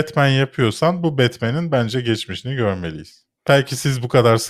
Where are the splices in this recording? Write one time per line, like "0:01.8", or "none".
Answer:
none